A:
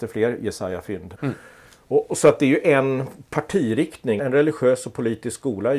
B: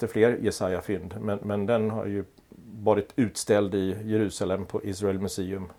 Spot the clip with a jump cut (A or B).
A